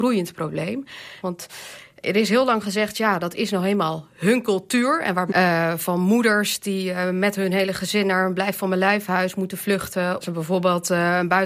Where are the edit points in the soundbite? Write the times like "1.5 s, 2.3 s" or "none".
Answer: 1.2 s, 5.3 s, 10.2 s